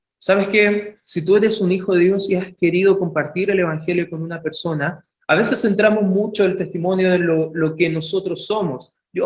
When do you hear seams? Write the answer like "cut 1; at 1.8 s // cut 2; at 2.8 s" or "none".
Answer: none